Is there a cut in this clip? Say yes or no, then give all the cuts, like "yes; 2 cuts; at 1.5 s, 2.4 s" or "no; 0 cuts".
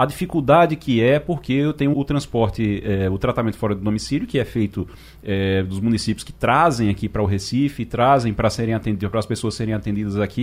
yes; 1 cut; at 1.9 s